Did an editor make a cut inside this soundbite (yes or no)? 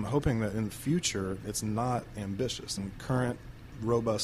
yes